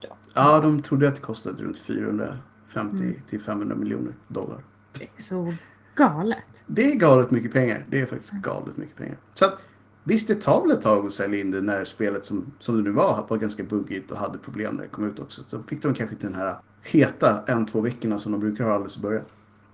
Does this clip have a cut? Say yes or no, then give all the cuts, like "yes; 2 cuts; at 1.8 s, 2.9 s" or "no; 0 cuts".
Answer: no; 0 cuts